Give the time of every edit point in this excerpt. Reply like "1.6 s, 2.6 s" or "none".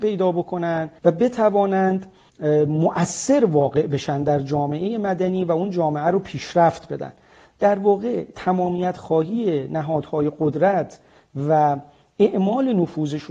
1.0 s